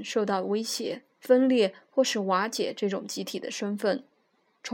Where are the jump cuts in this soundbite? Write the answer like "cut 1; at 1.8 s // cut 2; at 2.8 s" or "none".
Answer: cut 1; at 1.2 s